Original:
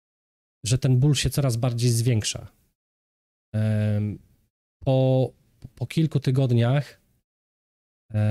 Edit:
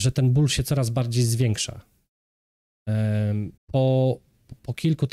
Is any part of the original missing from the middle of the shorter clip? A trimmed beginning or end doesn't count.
yes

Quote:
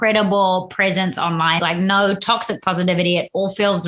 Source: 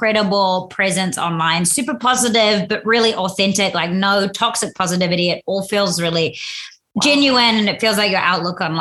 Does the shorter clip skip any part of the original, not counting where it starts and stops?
yes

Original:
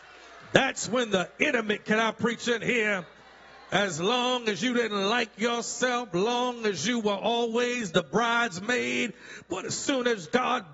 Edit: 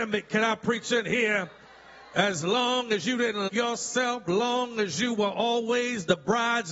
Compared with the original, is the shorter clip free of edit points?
no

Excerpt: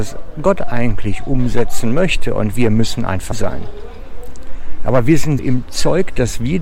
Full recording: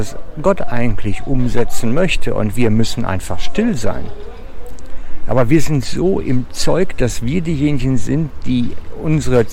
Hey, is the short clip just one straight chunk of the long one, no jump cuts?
no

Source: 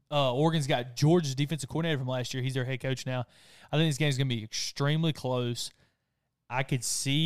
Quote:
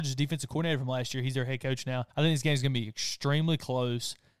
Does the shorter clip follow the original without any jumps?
no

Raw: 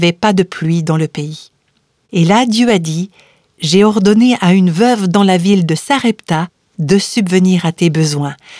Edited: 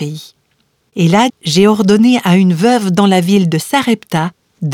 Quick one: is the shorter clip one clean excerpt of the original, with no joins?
no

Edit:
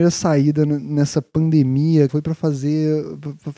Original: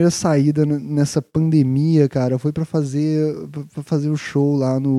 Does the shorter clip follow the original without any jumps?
no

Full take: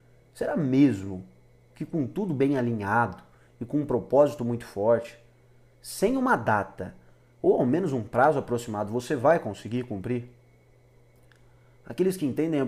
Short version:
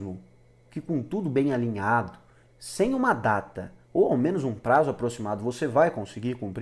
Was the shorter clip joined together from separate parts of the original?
yes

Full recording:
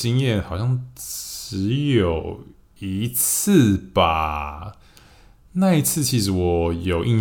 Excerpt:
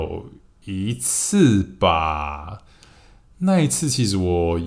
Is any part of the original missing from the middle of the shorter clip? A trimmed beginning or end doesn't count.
no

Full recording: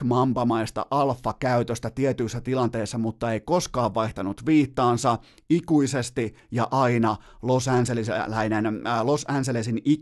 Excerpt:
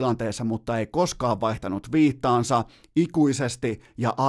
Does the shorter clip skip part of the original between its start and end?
no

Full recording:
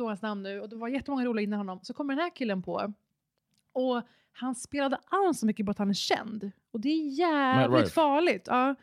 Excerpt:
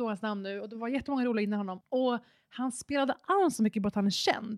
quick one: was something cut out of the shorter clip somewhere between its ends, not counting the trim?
yes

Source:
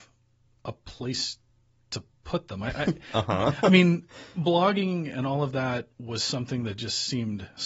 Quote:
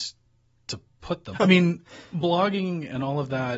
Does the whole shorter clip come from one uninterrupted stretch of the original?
no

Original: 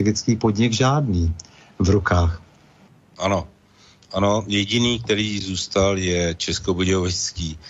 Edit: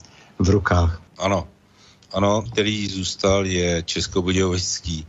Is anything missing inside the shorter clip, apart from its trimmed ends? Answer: yes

